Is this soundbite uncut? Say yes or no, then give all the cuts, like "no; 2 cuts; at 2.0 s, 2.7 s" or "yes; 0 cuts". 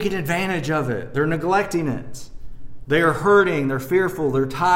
yes; 0 cuts